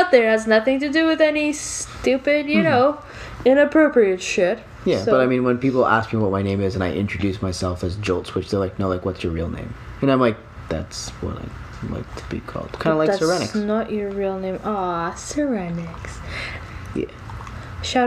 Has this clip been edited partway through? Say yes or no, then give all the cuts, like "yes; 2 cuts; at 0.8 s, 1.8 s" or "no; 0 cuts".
yes; 1 cut; at 16.9 s